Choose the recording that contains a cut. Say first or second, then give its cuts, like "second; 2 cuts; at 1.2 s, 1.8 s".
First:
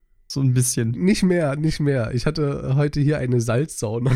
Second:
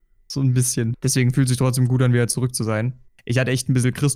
second; 2 cuts; at 0.9 s, 3.1 s